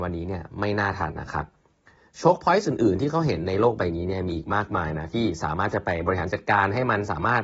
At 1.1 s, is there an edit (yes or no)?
yes